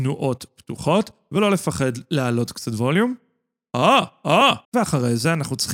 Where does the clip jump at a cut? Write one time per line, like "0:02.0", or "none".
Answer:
0:04.6